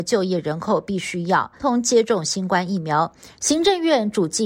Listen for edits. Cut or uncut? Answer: cut